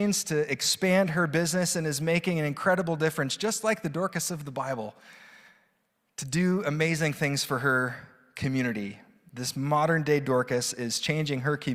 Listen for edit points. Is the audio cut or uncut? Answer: uncut